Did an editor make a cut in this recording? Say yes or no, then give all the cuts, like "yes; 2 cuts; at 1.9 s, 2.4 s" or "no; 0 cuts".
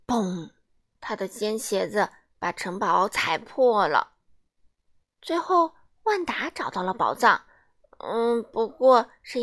no; 0 cuts